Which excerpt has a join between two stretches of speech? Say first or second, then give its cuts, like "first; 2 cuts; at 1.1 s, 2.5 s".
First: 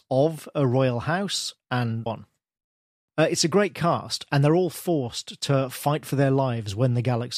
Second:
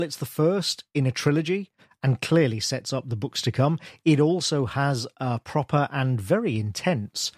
first; 1 cut; at 2.1 s